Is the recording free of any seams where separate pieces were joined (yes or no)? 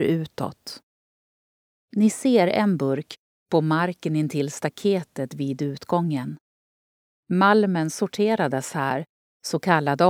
yes